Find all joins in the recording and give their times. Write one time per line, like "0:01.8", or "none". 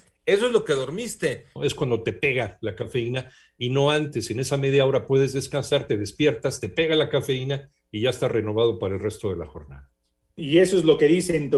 0:01.6